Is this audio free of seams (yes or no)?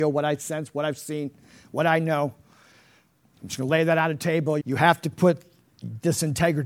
no